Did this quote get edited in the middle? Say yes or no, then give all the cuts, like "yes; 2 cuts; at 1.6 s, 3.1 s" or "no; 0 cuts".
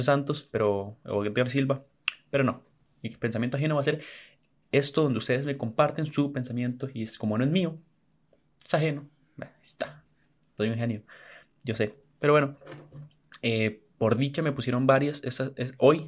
no; 0 cuts